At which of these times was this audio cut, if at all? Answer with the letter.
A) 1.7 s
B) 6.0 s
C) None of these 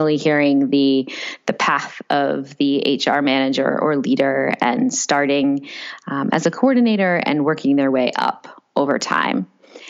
C